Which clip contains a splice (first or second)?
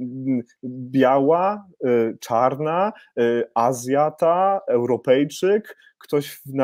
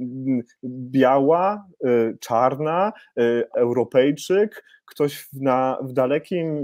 second